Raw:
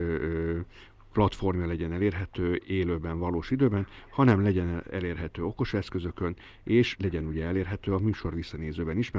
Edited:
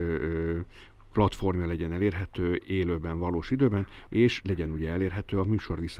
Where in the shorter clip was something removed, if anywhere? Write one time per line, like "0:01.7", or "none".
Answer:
0:04.1